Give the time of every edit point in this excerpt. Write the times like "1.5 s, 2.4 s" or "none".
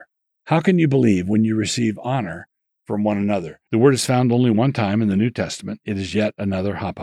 3.7 s